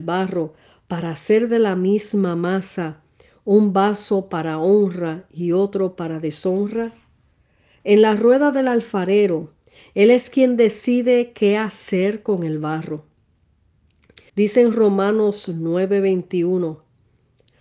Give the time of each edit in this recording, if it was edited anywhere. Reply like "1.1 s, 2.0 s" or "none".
14.3 s